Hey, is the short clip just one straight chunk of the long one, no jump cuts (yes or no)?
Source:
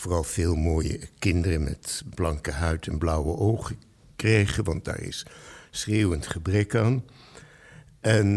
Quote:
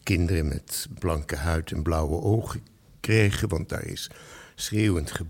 yes